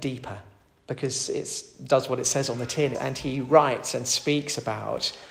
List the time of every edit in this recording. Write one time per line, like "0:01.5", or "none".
0:02.9

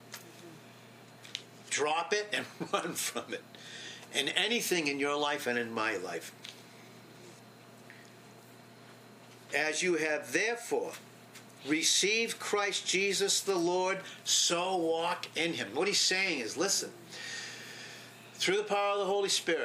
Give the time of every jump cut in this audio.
none

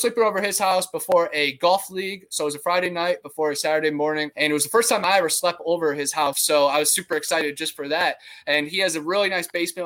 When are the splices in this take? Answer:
0:04.3
0:06.3

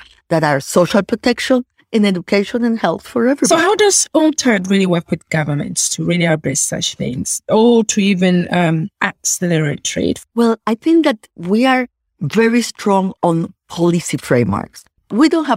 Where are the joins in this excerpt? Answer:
none

